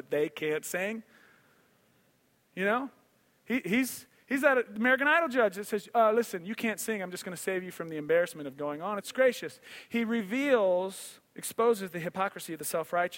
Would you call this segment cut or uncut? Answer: cut